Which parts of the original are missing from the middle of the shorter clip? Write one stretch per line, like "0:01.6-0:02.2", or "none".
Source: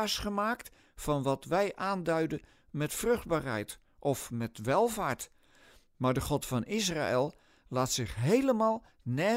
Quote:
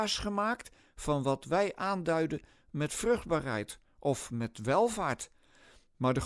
none